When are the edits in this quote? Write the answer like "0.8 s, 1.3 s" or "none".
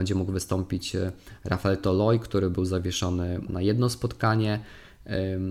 3.5 s